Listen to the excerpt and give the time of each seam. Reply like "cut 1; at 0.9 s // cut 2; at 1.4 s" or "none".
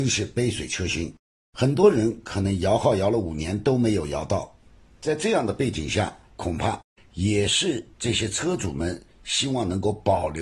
cut 1; at 6.3 s // cut 2; at 7.9 s